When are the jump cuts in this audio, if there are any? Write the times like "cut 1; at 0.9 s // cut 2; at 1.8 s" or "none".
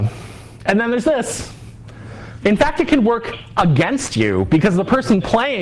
cut 1; at 2.4 s

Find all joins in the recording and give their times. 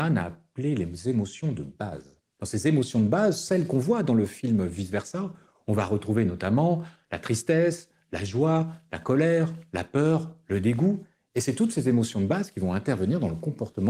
none

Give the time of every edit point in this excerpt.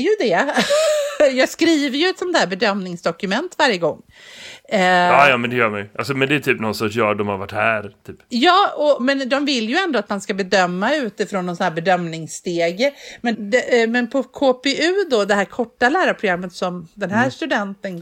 cut 1; at 9.0 s // cut 2; at 13.3 s

